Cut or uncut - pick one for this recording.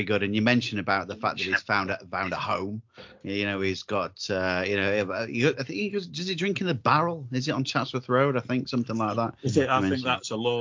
uncut